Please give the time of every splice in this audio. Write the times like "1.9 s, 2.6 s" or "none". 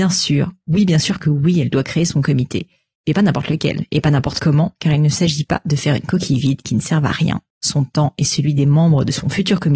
none